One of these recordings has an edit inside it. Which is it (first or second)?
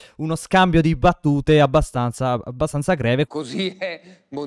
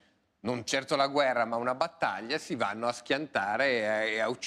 first